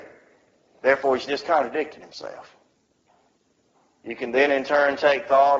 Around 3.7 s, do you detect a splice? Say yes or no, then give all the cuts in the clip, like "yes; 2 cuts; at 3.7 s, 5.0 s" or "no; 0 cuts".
no; 0 cuts